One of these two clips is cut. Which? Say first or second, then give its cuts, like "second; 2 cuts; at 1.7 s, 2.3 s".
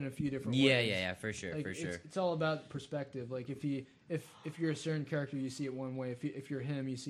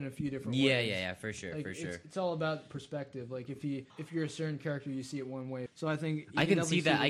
second; 2 cuts; at 3.9 s, 5.7 s